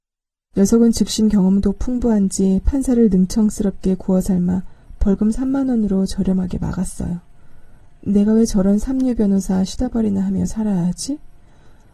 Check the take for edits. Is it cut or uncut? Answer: cut